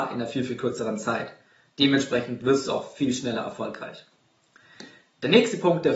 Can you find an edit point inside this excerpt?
no; 0 cuts

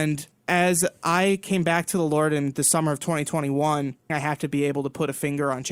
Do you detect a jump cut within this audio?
yes; 1 cut; at 4.1 s

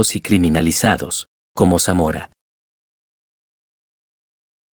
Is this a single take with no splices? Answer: yes; 0 cuts

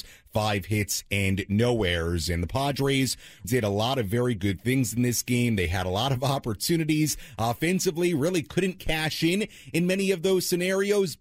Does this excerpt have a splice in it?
yes; 1 cut; at 3.4 s

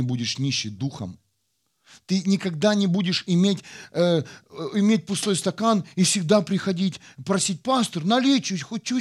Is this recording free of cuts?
yes; 0 cuts

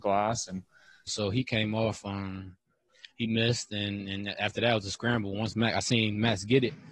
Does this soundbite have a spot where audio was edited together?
yes; 1 cut; at 1.1 s

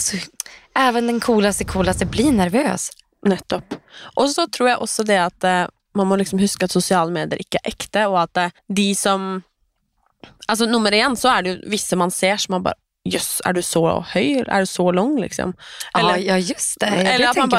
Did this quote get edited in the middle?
yes; 1 cut; at 8.6 s

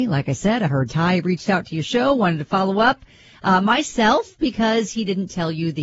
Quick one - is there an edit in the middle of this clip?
no; 0 cuts

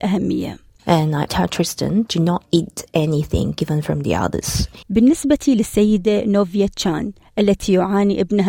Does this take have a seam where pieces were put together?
yes; 2 cuts; at 1.3 s, 4.8 s

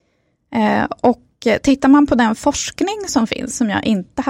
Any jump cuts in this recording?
no; 0 cuts

